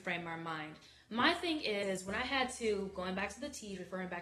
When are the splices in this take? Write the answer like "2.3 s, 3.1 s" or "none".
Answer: none